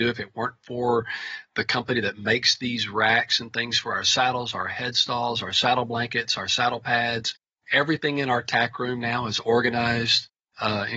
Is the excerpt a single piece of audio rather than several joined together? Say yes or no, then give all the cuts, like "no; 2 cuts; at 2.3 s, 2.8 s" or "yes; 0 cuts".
yes; 0 cuts